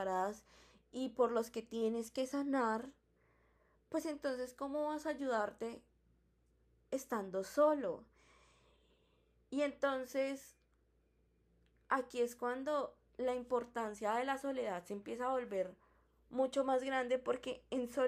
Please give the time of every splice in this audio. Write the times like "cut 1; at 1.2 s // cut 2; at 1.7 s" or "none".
none